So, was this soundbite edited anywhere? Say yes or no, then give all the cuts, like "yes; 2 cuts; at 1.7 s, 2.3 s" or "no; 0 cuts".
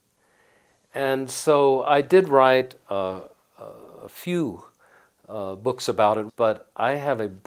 yes; 1 cut; at 6.3 s